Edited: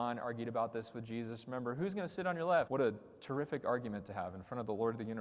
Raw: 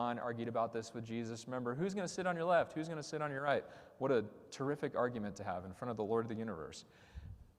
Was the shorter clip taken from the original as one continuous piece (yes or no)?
no